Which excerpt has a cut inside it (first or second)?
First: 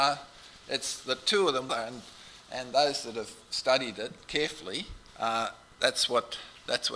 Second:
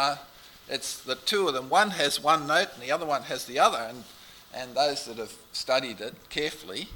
first